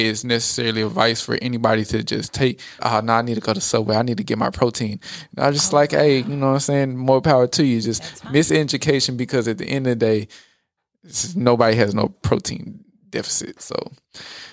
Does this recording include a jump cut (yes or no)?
yes